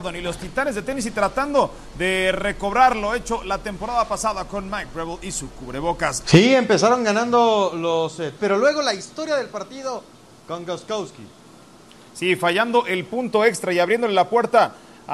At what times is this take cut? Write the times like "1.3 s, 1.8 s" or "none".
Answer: 6.2 s, 8.4 s